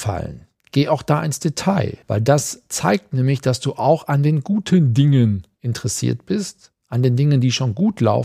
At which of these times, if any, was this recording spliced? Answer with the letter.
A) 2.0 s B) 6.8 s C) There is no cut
A